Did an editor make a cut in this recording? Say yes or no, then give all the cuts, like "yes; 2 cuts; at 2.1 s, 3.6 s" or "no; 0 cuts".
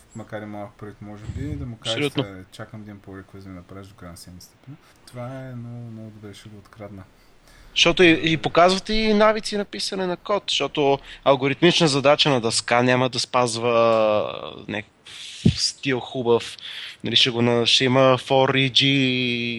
yes; 1 cut; at 4.9 s